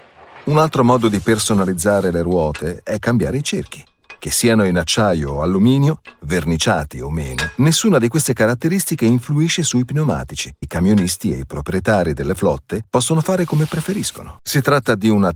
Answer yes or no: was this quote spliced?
yes